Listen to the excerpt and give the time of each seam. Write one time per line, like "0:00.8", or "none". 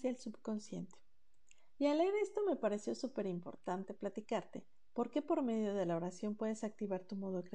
0:01.8